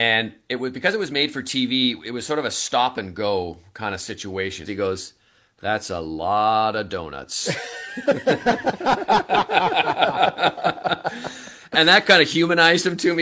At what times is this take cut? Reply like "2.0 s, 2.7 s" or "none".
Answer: 4.7 s